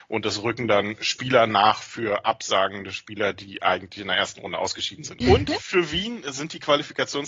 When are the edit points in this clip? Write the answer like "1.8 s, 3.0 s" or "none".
5.2 s